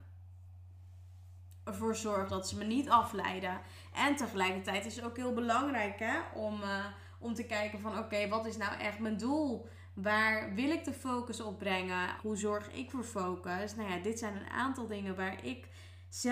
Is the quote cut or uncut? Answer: cut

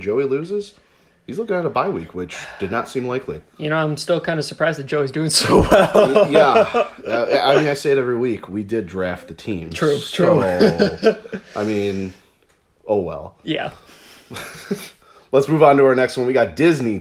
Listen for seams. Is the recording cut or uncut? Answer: uncut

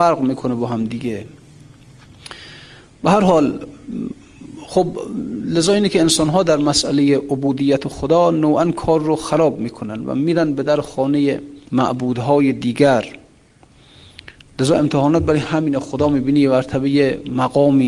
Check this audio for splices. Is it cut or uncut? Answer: cut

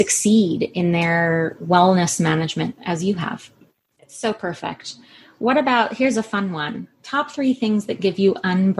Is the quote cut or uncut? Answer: cut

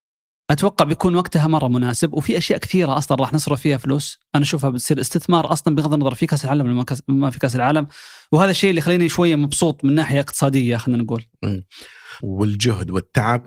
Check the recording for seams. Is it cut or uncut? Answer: cut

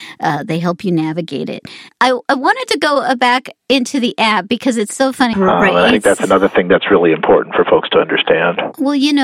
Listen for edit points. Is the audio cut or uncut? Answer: cut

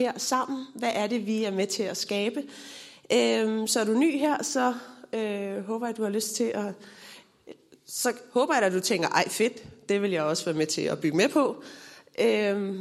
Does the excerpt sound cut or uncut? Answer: uncut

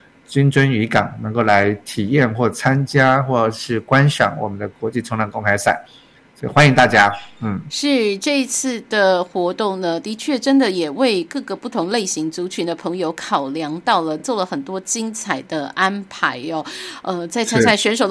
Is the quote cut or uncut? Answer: uncut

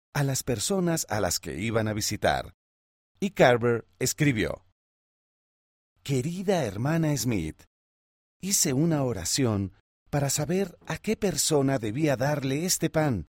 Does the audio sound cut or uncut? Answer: uncut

